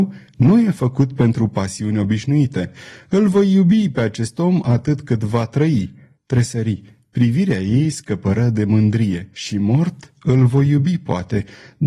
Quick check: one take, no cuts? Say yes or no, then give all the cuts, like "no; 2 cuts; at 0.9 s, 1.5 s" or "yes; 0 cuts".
no; 2 cuts; at 6.2 s, 9.3 s